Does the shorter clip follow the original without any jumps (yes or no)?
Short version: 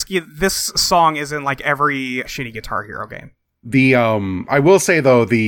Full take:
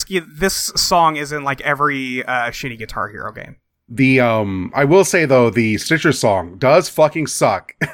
no